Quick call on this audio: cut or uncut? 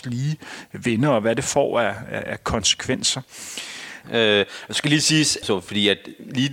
cut